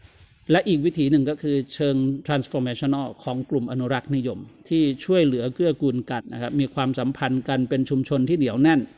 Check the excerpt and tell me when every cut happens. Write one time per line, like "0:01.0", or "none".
0:06.2